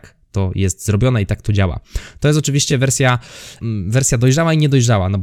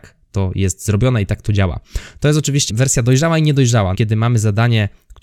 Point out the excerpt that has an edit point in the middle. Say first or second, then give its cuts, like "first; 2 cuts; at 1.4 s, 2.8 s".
second; 2 cuts; at 2.7 s, 3.9 s